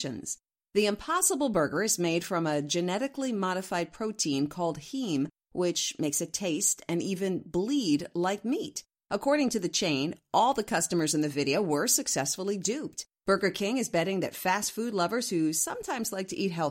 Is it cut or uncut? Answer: uncut